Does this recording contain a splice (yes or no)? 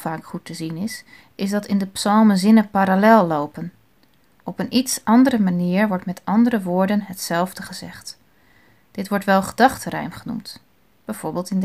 no